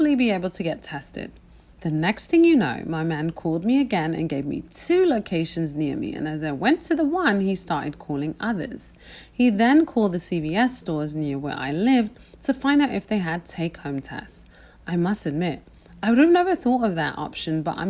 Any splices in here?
yes; 1 cut; at 1.7 s

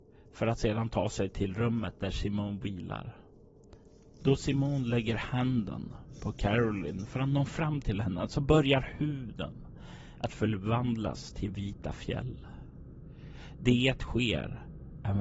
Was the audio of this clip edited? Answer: yes; 1 cut; at 4.2 s

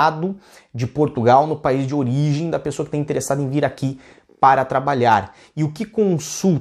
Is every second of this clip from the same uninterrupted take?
yes; 0 cuts

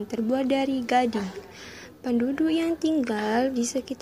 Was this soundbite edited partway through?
no; 0 cuts

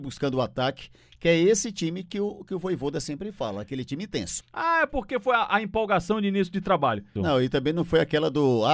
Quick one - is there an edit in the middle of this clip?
yes; 2 cuts; at 4.4 s, 7.2 s

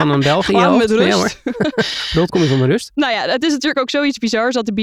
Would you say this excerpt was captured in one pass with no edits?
no; 1 cut; at 2.3 s

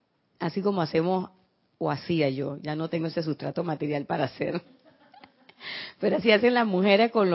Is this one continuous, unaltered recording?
no; 1 cut; at 2.6 s

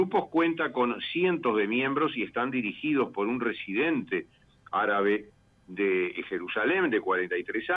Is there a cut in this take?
no; 0 cuts

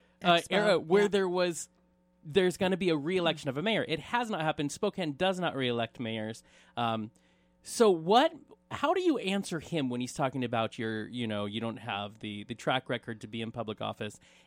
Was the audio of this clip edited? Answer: no; 0 cuts

